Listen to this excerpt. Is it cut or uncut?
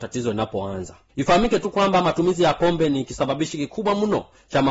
uncut